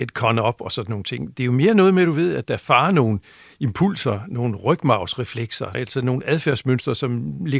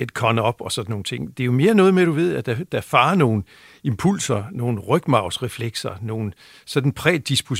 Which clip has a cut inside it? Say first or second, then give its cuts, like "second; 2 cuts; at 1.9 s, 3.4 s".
first; 2 cuts; at 2.4 s, 5.7 s